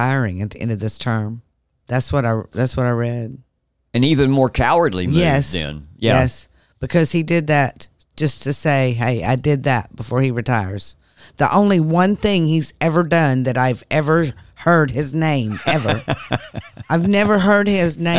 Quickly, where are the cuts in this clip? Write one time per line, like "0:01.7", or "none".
none